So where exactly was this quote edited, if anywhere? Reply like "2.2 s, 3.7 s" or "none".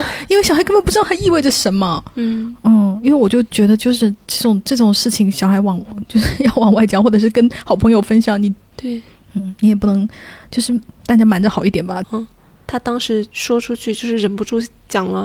8.7 s, 12.0 s